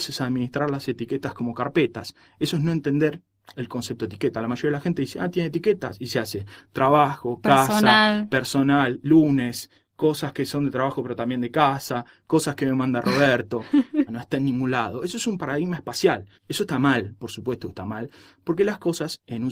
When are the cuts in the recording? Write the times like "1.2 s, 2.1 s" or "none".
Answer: 14.1 s, 16.4 s